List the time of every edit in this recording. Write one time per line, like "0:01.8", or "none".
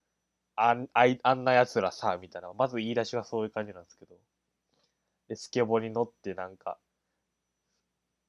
none

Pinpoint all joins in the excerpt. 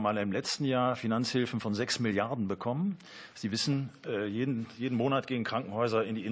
none

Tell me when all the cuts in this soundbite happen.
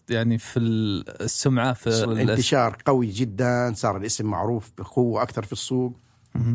0:02.1

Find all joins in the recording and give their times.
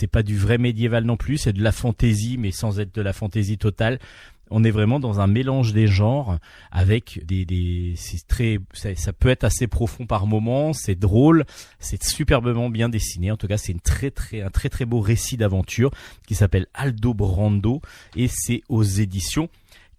0:07.2
0:08.3

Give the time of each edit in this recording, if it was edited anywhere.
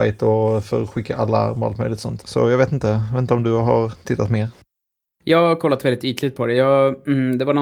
0:02.2

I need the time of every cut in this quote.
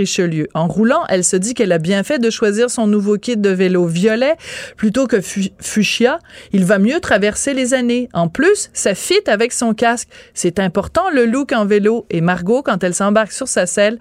none

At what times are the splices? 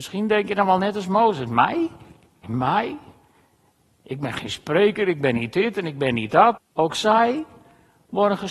0:02.4
0:06.6

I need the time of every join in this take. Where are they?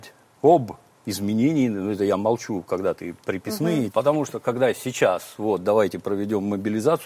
0:03.9

